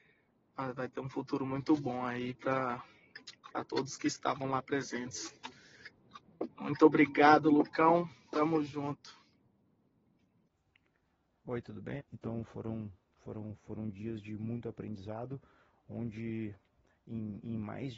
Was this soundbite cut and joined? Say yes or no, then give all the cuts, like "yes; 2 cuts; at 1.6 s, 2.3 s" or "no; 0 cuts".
yes; 1 cut; at 12.0 s